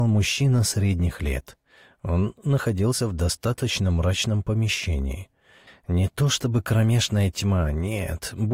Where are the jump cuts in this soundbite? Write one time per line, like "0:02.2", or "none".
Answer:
0:05.7